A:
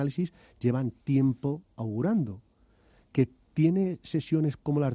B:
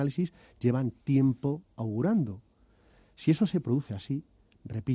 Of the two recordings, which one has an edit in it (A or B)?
A